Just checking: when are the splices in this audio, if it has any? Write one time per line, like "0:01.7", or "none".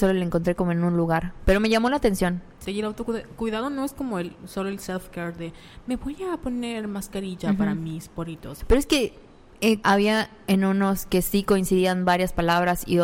0:02.7
0:08.6
0:09.8